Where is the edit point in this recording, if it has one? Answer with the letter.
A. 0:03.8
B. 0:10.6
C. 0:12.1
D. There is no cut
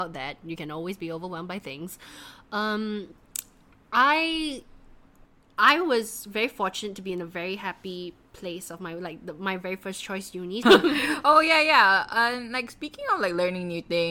B